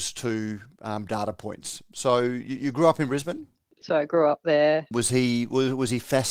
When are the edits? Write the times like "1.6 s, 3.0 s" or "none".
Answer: 3.8 s, 4.9 s